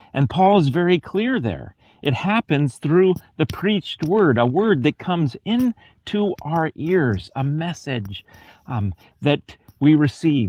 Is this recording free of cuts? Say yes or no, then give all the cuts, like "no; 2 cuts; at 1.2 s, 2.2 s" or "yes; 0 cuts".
yes; 0 cuts